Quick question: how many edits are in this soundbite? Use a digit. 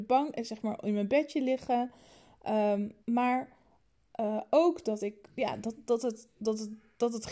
0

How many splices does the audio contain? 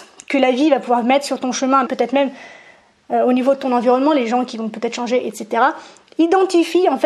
1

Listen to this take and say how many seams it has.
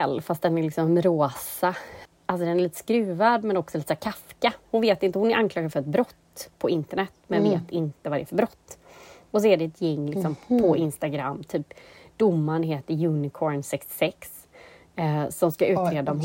1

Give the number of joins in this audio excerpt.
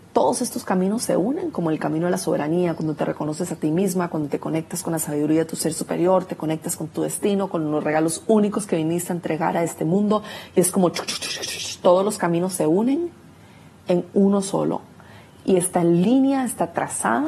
0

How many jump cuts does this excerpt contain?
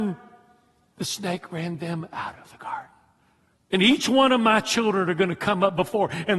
1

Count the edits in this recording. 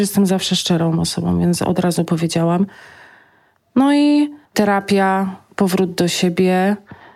1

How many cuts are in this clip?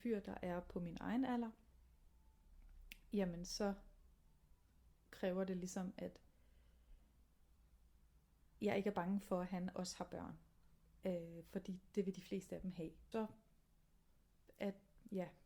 1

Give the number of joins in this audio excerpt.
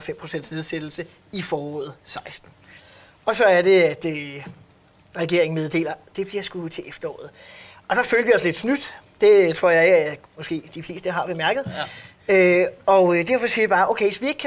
2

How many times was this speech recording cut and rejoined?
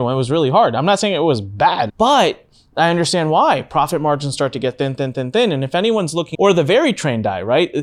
3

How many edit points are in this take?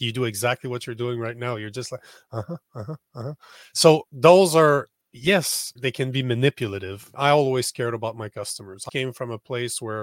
3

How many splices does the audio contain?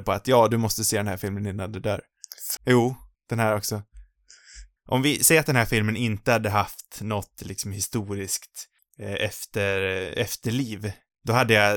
2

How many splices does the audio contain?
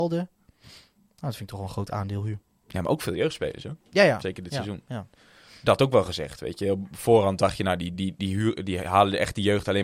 0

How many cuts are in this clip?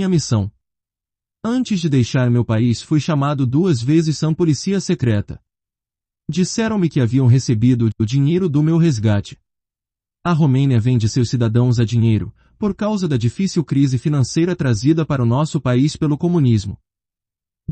0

